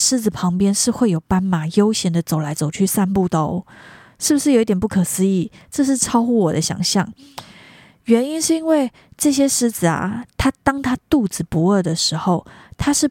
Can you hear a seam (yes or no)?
no